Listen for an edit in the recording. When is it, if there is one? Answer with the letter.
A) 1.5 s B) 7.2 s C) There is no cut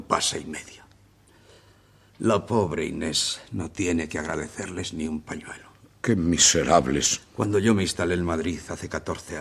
C